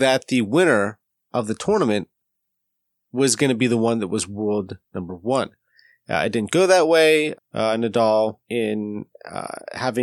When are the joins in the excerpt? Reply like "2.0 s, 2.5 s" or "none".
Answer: 7.3 s, 8.4 s